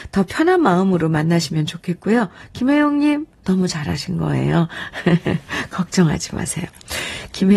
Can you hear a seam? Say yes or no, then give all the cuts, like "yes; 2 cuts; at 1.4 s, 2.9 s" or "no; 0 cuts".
no; 0 cuts